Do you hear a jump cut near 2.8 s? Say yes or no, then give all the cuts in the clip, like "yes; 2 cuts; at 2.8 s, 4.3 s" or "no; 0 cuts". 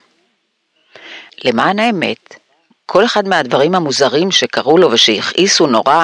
no; 1 cut; at 1.3 s